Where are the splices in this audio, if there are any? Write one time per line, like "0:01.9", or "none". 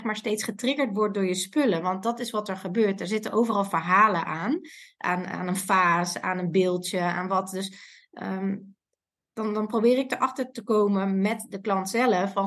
none